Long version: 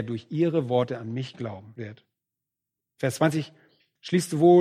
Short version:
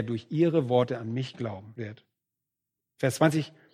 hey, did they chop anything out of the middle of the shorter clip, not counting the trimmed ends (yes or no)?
no